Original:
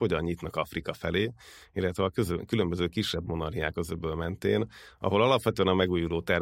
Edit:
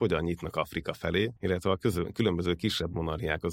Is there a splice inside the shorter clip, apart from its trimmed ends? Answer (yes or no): yes